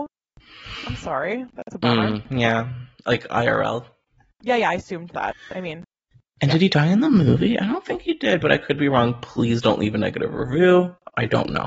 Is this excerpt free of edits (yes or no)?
yes